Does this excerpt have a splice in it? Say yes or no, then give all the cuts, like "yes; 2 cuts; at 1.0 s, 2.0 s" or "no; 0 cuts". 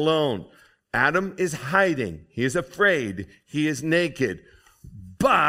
no; 0 cuts